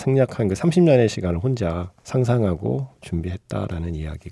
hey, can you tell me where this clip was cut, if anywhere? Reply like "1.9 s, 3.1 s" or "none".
2.0 s